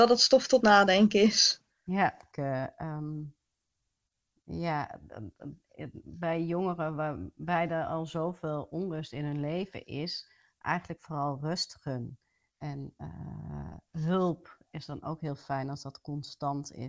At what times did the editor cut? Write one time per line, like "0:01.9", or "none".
0:02.3
0:12.5
0:13.9